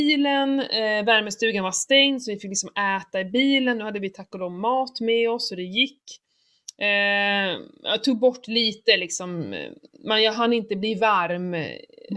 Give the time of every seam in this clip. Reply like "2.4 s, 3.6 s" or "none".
none